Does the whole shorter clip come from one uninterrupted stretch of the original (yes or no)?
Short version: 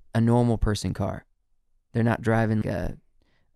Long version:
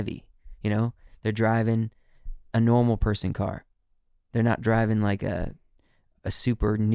no